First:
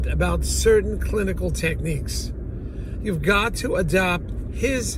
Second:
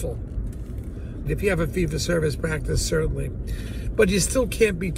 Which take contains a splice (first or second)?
second